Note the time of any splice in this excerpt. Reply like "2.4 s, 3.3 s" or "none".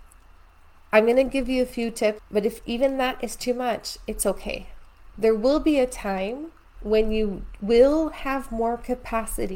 2.2 s, 5.1 s

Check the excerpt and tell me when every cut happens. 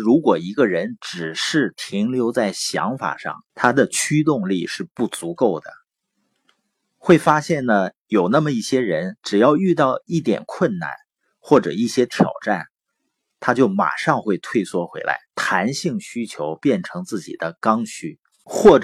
3.5 s, 15.3 s

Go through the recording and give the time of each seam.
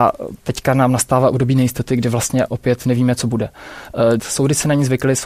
2.5 s, 4.2 s

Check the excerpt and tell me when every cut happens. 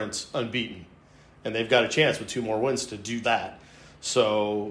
3.2 s

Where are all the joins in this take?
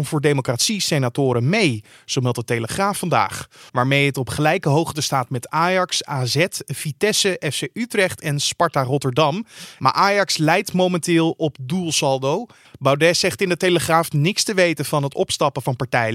3.7 s, 12.6 s

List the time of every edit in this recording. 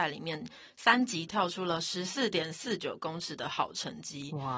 1.3 s

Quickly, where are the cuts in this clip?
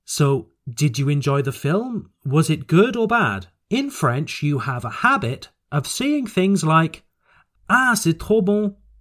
3.6 s

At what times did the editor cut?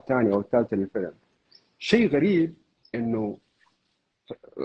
none

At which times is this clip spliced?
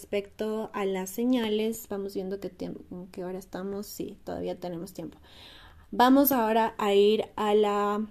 none

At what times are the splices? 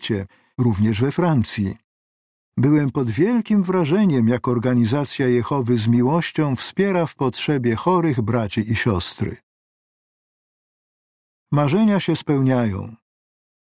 none

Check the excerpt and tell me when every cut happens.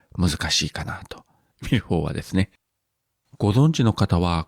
1.5 s

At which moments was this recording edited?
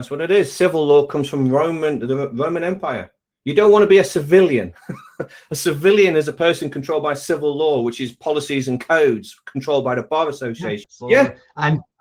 10.8 s

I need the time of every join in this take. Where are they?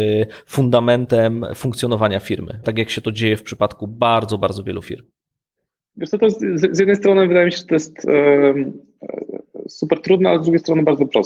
2.6 s

